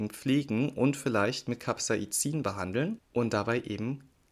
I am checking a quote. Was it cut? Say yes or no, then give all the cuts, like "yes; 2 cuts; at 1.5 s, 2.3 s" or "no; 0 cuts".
no; 0 cuts